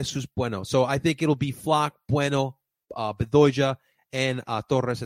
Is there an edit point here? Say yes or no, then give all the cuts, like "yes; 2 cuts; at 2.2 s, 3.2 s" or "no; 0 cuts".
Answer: no; 0 cuts